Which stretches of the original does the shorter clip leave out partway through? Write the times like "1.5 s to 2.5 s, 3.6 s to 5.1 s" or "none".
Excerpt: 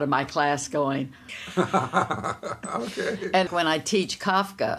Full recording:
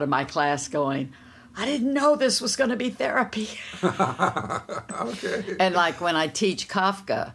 1.3 s to 3.5 s, 5.7 s to 6.0 s